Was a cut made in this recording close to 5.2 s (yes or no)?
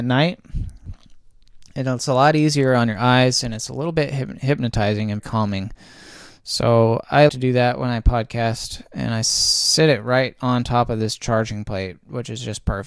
yes